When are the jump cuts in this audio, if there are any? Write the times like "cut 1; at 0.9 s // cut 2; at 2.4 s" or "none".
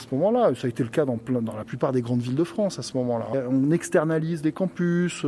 cut 1; at 3.3 s